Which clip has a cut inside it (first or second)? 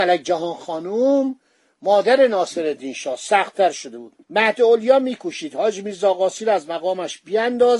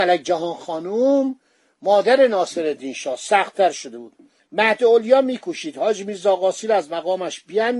first